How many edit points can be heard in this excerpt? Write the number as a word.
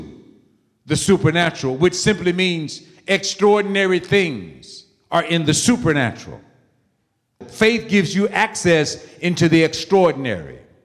one